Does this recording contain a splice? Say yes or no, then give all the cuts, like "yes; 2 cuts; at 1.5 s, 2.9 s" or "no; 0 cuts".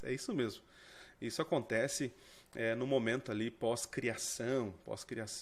no; 0 cuts